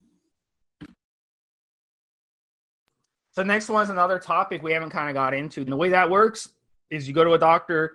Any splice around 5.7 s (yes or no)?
yes